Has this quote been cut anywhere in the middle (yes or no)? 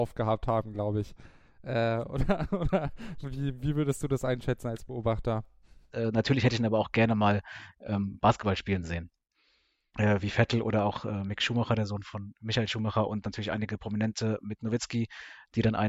yes